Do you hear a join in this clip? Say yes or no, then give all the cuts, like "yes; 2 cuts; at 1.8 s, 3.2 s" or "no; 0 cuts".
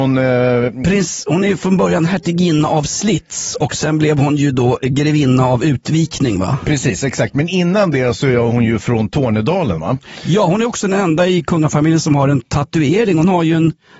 no; 0 cuts